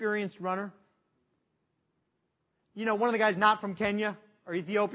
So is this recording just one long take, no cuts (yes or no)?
yes